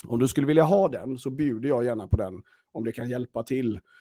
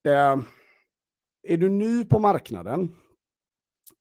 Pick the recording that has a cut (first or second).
second